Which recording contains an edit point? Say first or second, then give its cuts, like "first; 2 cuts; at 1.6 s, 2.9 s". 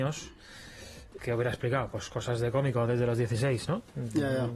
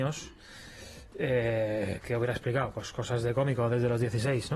first; 1 cut; at 1.2 s